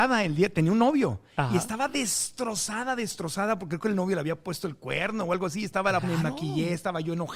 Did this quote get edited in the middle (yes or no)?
yes